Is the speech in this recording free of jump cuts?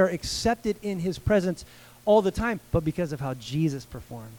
no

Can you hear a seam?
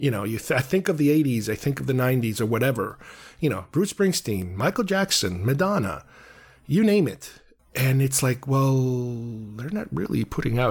no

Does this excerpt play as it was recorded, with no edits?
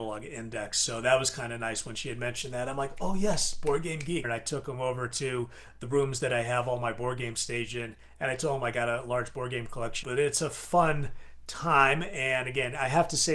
no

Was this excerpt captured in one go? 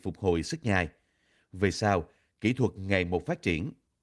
yes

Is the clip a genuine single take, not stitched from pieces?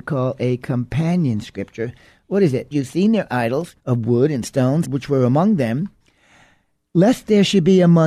no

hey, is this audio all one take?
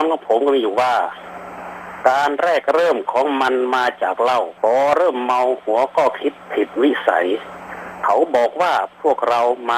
no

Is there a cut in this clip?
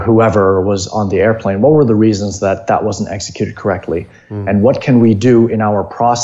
no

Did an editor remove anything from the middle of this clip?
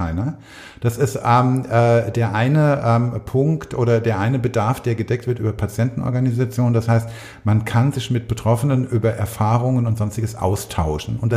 no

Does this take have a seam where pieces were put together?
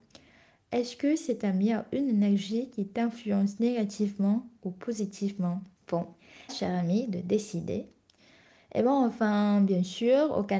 yes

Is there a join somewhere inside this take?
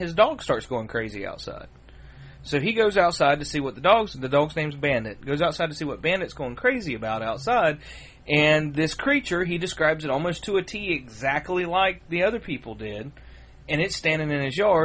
no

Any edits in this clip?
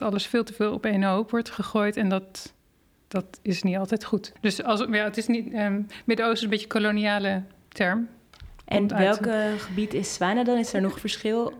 yes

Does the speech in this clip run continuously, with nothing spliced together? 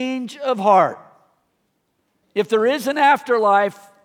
no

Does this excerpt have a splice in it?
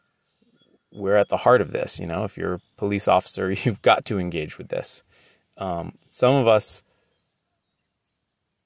no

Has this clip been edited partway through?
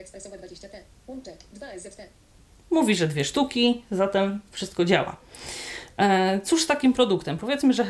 no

